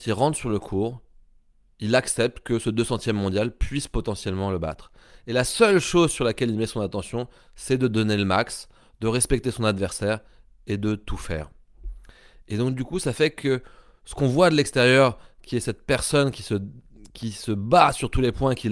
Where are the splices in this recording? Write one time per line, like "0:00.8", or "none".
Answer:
none